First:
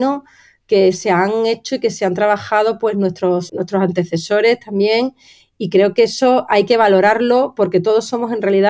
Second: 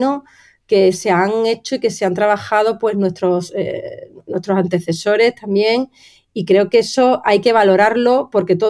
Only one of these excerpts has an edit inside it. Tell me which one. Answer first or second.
first